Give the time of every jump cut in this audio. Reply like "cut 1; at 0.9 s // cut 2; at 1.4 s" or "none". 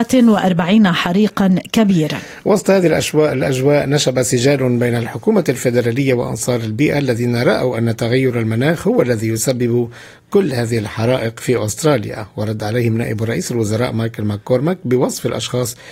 none